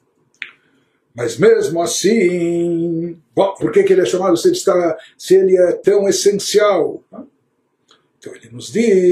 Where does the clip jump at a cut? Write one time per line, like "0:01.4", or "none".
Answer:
0:03.6
0:07.1